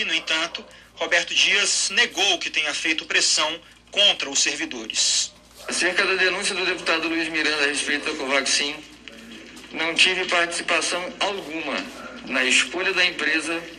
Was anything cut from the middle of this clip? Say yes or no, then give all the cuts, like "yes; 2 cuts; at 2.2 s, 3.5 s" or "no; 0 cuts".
no; 0 cuts